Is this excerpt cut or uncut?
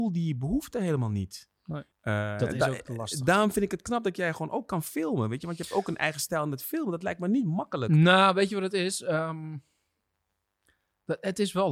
cut